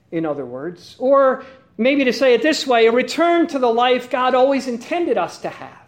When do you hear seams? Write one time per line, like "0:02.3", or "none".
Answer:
none

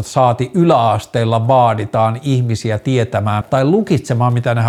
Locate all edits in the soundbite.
0:03.4

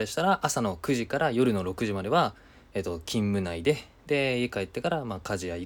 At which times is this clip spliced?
none

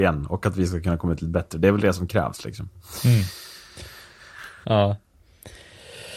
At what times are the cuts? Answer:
0:04.6

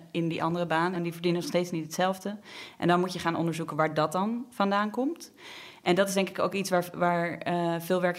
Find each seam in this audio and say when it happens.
0:00.9

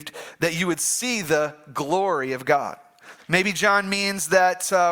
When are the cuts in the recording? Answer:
0:03.2

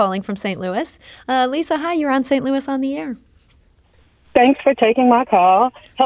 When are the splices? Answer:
none

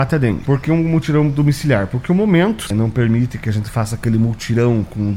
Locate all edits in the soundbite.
0:02.7

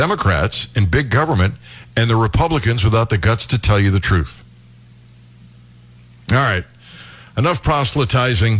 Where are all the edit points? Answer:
none

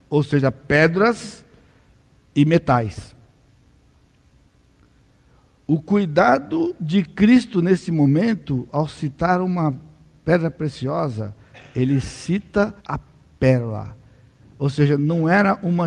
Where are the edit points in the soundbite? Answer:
0:12.8

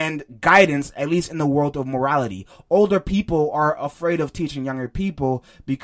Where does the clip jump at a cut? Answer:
none

